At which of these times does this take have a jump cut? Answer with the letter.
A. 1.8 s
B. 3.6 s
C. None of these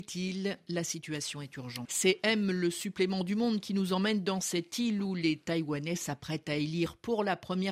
A